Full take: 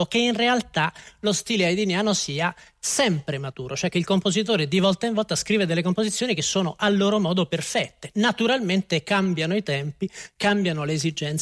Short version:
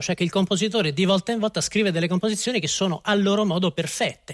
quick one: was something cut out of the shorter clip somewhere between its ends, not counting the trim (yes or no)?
no